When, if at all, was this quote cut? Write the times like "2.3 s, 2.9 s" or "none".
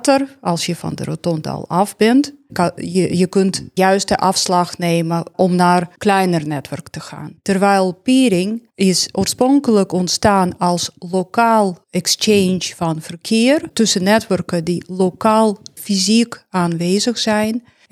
2.5 s

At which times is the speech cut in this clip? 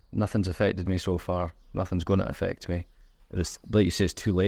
3.2 s

